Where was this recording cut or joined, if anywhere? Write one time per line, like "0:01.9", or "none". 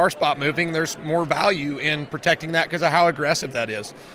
none